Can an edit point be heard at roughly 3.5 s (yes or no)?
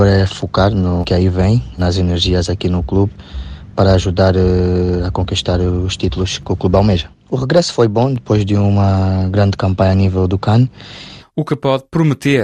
no